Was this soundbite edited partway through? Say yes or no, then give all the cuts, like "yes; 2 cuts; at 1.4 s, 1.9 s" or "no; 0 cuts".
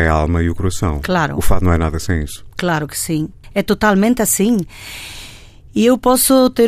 no; 0 cuts